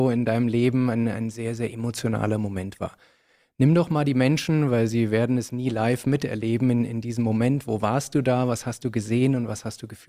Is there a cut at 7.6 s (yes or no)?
no